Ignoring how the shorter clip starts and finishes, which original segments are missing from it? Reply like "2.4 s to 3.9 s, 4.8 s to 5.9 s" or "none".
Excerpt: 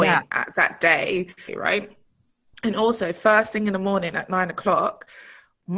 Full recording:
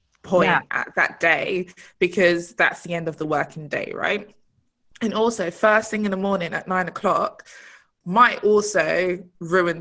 1.9 s to 3.9 s